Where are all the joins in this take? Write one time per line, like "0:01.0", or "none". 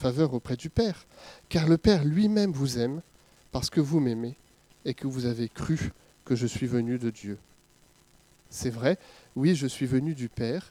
none